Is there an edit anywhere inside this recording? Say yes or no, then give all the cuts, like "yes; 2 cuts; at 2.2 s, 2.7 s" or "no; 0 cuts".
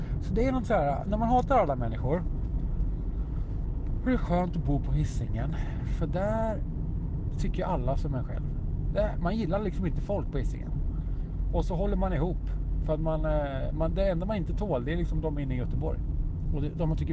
no; 0 cuts